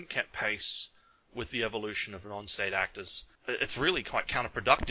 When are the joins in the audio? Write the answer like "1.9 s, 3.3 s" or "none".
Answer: 3.3 s